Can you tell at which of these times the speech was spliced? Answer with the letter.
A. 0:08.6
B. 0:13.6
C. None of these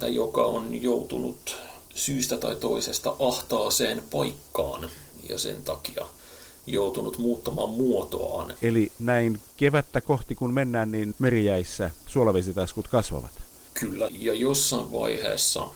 A